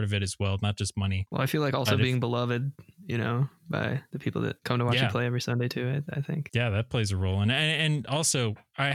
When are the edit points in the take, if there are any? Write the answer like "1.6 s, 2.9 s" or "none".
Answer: none